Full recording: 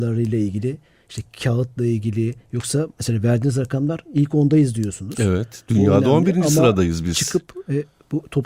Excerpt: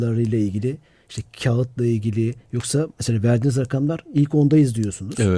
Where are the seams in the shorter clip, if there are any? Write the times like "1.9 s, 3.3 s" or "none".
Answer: none